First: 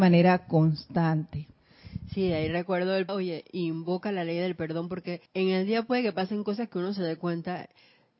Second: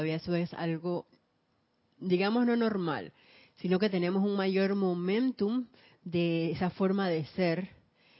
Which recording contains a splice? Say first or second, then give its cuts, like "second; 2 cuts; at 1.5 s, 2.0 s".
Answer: first; 2 cuts; at 3.1 s, 5.3 s